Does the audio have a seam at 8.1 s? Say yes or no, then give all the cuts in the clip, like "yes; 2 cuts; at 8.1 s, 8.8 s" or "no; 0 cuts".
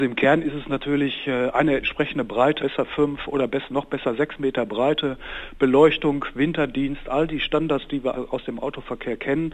yes; 2 cuts; at 2.6 s, 8.1 s